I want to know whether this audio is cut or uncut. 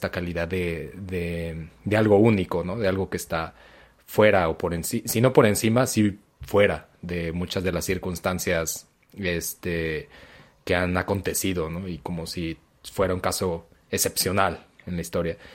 uncut